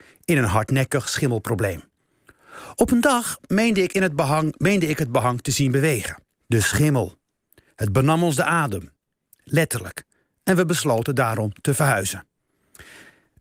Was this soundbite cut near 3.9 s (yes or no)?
no